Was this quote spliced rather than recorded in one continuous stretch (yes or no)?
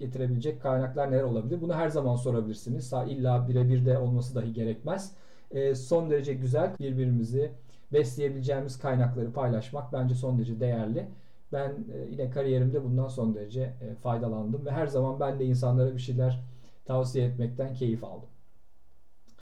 yes